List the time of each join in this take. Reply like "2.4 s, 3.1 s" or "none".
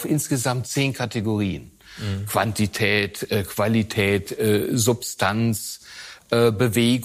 none